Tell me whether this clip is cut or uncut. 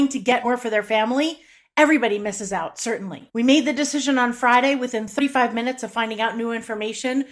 cut